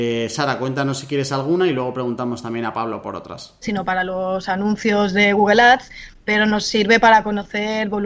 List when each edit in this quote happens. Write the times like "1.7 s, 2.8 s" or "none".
3.6 s